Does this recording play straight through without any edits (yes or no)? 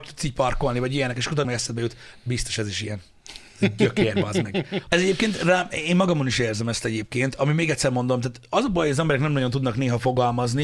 no